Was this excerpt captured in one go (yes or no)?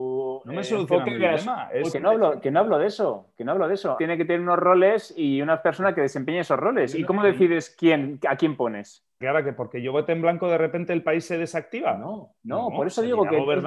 no